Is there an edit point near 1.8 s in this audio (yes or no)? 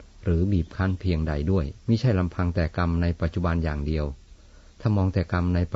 yes